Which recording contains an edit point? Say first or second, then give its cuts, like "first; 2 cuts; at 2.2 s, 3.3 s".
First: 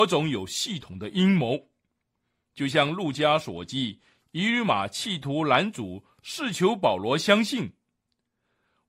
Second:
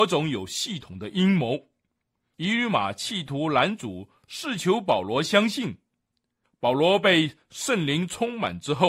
second; 2 cuts; at 2.3 s, 6.4 s